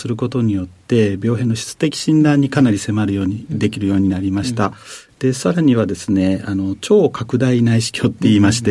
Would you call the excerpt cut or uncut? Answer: uncut